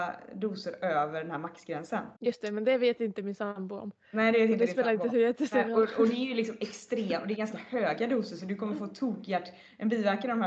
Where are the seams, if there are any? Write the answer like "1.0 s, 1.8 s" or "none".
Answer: 2.2 s